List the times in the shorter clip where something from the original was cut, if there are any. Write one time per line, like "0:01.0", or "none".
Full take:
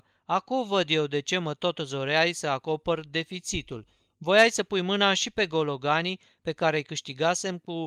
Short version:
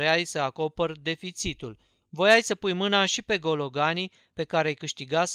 none